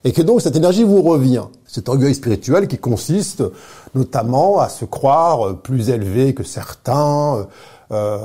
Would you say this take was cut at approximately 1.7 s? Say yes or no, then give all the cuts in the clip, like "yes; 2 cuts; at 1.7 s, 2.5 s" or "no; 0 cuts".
yes; 1 cut; at 1.7 s